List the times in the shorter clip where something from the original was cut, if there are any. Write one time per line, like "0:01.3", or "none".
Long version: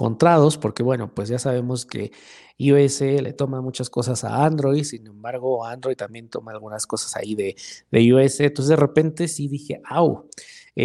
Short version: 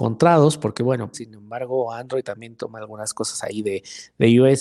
0:01.1